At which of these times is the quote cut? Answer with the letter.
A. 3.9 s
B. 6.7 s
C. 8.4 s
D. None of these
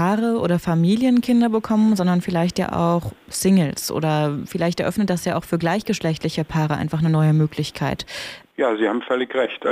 C